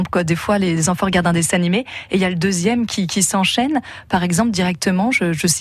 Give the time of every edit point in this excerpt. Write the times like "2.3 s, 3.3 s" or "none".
none